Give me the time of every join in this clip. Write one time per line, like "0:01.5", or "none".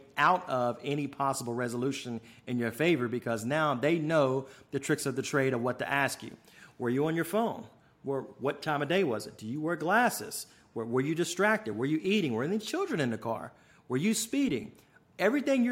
none